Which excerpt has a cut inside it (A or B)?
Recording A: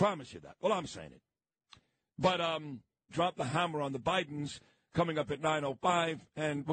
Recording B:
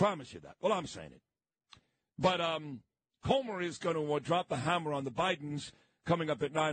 A